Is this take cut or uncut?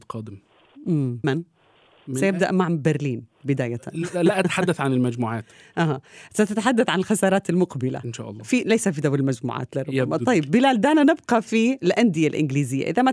cut